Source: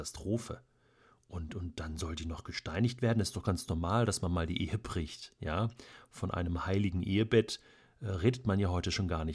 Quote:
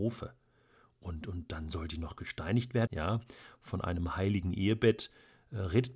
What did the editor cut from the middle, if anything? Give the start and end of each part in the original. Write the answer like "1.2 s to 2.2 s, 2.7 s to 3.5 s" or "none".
3.1 s to 5.4 s